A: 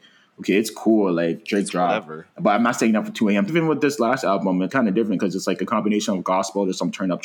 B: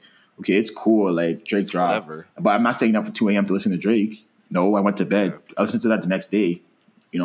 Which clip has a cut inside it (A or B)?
A